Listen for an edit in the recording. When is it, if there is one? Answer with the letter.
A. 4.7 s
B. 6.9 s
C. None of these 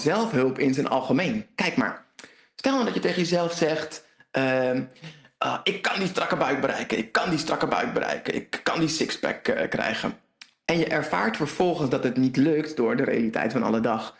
C